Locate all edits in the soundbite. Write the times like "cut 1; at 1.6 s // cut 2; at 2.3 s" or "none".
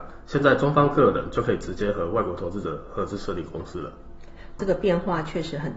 cut 1; at 4.6 s